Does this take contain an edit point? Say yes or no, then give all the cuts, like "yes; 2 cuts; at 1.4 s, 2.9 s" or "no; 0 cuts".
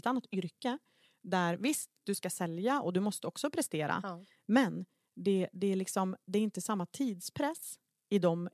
no; 0 cuts